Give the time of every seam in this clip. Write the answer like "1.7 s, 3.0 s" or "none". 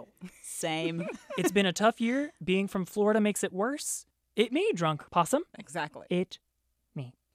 none